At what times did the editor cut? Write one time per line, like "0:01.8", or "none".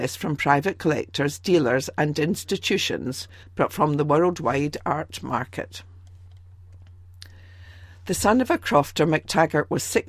0:03.4